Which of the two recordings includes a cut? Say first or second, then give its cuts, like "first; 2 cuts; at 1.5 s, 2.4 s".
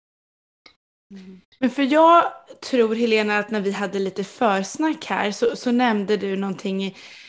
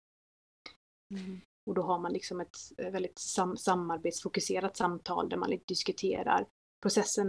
second; 1 cut; at 1.5 s